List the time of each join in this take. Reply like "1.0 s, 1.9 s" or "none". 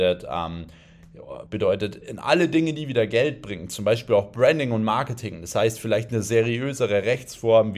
1.5 s